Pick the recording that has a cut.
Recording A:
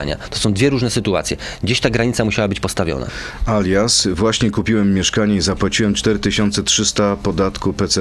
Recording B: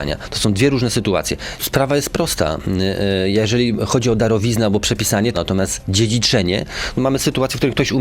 B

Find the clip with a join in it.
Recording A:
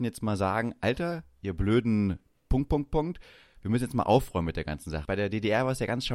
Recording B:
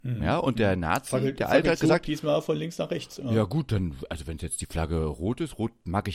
A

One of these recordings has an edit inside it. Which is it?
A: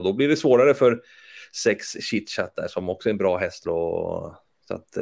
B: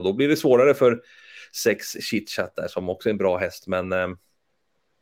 A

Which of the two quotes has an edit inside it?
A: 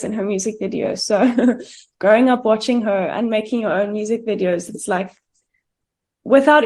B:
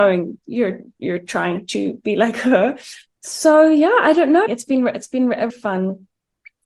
B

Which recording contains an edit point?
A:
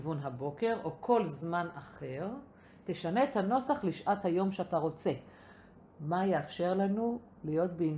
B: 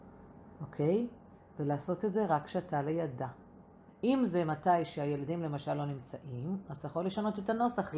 B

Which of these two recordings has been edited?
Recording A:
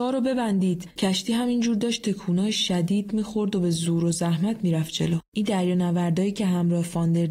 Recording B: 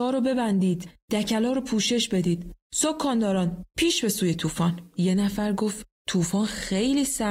A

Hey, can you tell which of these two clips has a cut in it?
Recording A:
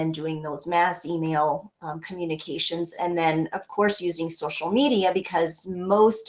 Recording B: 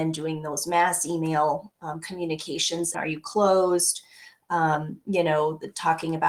B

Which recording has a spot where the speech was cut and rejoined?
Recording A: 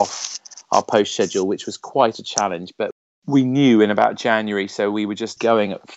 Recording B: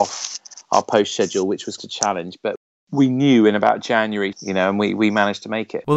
B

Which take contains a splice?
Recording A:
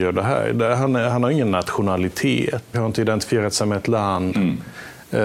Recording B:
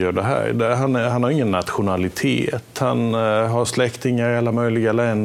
A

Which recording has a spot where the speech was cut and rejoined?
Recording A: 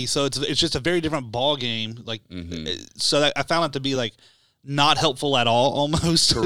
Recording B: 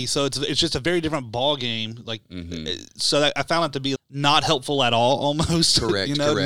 B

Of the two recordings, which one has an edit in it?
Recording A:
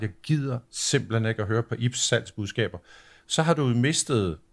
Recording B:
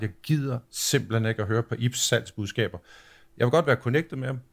A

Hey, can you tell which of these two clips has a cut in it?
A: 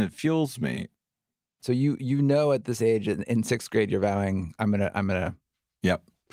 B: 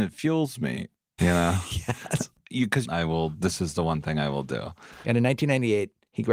B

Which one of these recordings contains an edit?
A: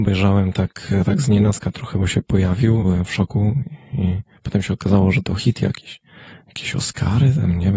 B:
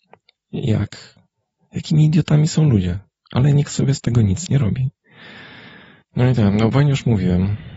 A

